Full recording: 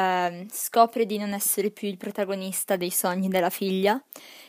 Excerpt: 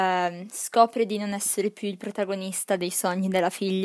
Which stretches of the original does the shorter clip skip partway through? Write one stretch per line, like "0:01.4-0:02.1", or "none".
none